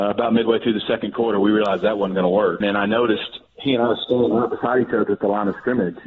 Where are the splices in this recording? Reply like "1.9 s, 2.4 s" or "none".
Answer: 2.6 s